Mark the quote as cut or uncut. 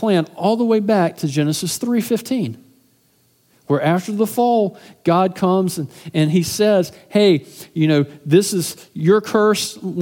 uncut